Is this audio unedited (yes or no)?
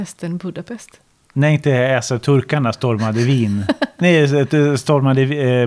yes